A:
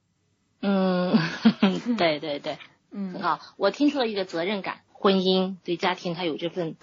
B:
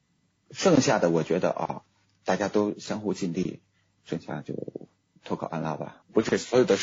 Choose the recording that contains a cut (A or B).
A